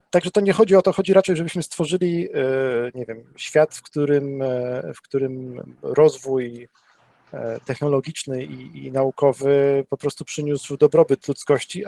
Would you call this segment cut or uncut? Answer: uncut